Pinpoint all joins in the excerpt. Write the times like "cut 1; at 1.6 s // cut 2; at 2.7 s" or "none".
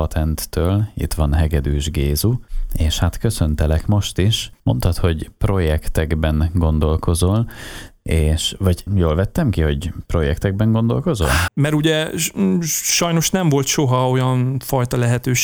cut 1; at 8.9 s // cut 2; at 11.5 s